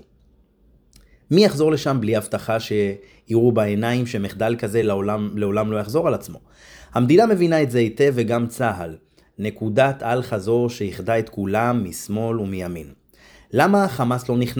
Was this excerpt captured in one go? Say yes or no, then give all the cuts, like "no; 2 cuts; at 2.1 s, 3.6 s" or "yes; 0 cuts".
yes; 0 cuts